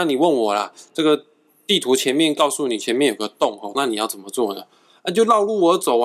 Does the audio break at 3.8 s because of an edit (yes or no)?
yes